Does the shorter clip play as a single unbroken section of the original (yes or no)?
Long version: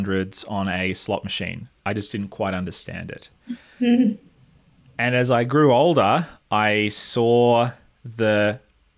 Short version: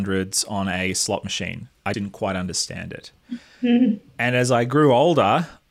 no